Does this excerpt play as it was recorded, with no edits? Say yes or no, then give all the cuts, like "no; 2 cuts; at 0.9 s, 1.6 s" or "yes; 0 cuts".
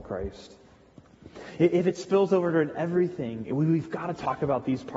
yes; 0 cuts